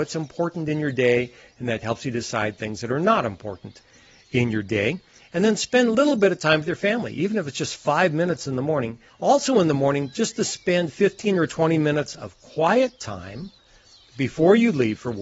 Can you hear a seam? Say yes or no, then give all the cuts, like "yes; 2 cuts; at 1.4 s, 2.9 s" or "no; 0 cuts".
yes; 1 cut; at 9.1 s